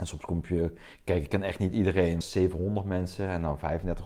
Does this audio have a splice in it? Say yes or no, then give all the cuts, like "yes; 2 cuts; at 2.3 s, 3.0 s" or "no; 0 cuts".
yes; 1 cut; at 2.2 s